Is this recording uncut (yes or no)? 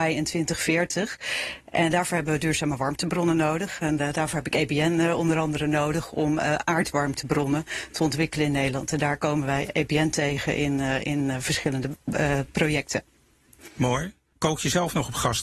yes